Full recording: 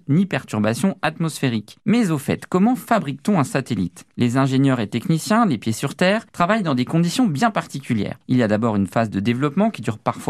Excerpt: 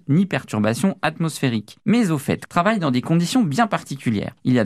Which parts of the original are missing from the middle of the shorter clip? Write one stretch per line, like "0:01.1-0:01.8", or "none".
0:02.5-0:06.3